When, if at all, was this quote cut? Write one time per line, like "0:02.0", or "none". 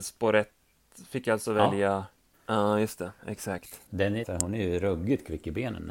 0:02.3
0:04.2